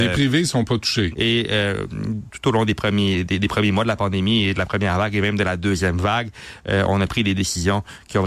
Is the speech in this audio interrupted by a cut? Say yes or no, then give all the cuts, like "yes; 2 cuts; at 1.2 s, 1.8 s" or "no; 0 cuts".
yes; 1 cut; at 1.1 s